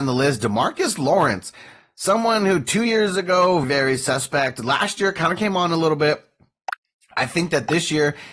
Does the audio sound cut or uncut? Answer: cut